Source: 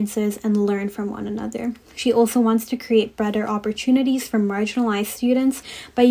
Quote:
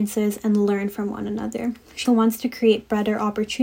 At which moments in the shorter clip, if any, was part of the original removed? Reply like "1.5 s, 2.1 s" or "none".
2.0 s

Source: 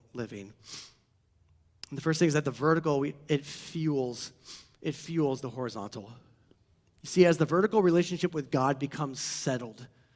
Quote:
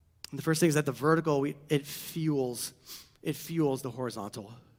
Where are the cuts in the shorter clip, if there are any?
none

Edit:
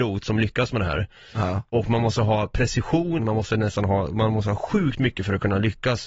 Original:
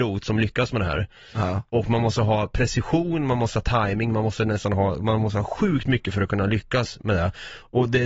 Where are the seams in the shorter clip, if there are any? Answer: 3.2 s

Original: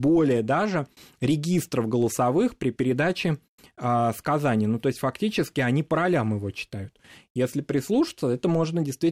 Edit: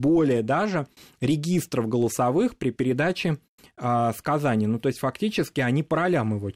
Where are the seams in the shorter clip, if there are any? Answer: none

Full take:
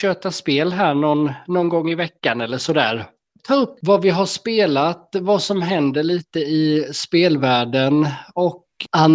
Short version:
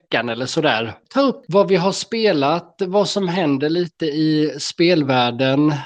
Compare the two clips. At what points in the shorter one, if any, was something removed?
1.0 s

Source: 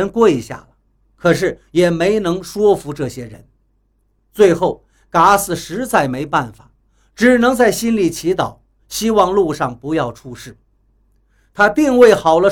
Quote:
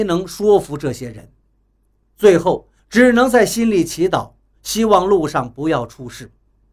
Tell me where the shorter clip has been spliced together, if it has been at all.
2.8 s

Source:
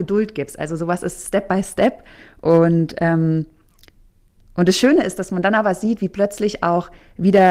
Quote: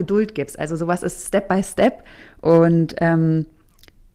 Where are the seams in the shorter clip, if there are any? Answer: none

